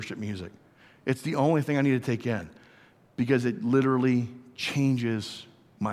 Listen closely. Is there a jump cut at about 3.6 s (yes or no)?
no